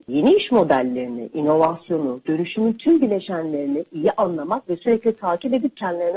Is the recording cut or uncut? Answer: uncut